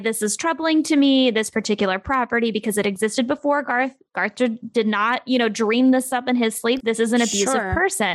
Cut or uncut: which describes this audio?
cut